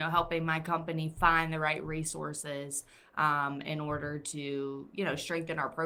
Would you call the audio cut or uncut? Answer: uncut